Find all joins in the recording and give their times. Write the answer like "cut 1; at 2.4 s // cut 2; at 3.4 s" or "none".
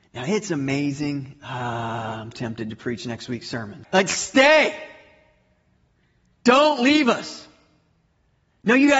cut 1; at 2.3 s // cut 2; at 3.8 s